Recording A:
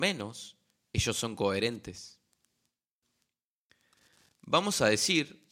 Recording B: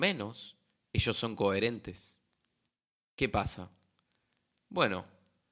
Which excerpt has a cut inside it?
B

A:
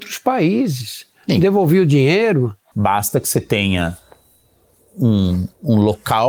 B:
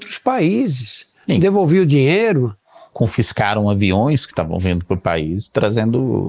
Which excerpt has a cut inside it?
A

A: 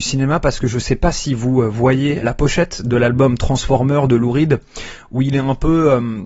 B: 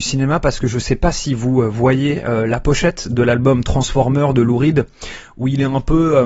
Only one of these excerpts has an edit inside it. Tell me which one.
A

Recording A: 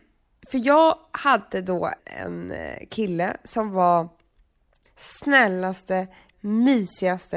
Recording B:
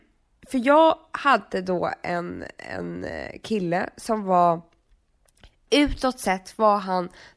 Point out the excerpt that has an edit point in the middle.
A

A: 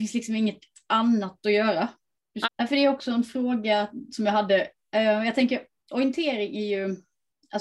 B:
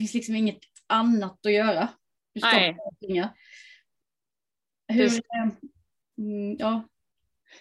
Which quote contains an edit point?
A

